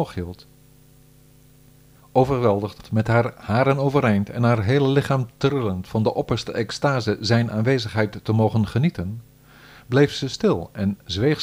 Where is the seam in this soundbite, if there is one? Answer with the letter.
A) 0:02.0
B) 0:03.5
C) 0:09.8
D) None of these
A